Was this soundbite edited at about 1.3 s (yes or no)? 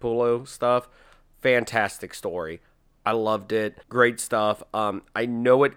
yes